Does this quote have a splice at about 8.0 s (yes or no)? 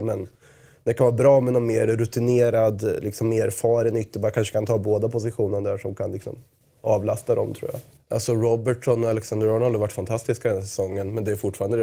yes